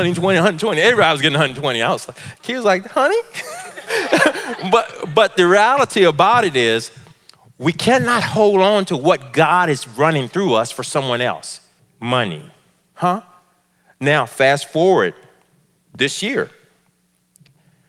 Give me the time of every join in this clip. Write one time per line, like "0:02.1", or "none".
0:11.8